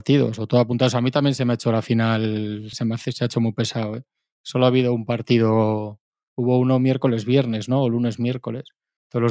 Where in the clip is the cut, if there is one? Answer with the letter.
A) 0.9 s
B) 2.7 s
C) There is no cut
B